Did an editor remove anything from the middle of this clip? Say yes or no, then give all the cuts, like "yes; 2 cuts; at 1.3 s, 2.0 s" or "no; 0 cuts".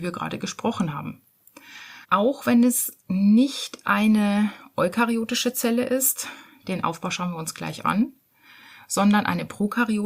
yes; 1 cut; at 2.0 s